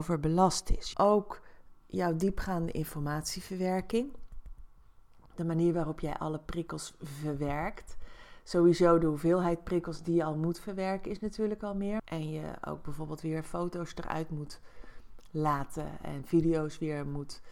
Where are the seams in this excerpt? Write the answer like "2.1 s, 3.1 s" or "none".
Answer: 0.9 s, 12.0 s